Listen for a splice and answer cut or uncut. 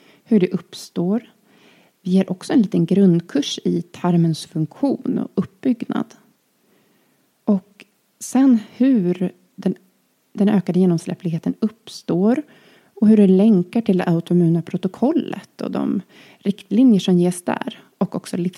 uncut